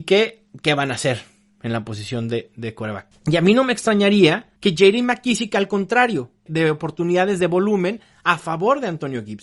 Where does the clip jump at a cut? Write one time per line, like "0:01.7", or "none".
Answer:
0:03.1
0:04.6
0:06.5